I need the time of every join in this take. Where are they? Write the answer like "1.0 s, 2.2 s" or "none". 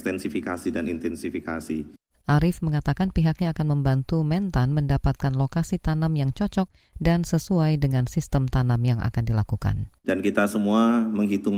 2.2 s, 10.0 s

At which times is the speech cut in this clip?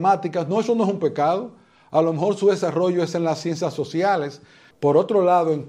4.7 s

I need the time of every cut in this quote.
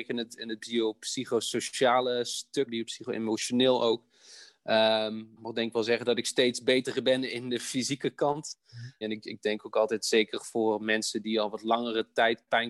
2.7 s, 5.4 s, 9.0 s

